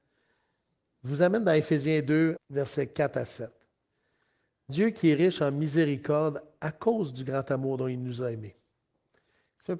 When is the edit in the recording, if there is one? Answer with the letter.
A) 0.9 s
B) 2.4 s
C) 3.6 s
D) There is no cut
B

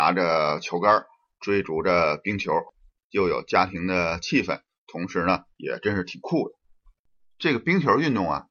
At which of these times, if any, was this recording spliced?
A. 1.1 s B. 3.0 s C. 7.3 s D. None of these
B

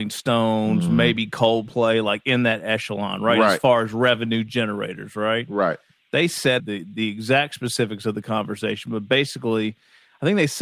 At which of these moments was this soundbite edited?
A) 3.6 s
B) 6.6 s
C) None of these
B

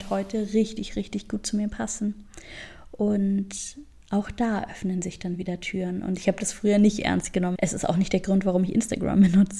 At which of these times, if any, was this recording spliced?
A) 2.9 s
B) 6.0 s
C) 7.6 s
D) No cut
C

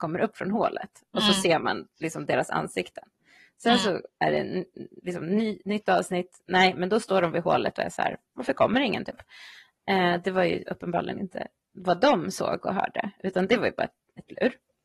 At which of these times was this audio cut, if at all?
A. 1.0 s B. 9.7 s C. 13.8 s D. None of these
D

